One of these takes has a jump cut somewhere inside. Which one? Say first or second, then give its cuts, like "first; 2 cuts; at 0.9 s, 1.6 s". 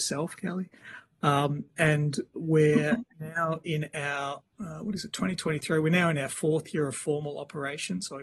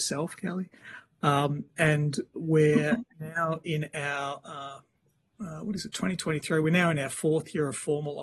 first; 1 cut; at 4.4 s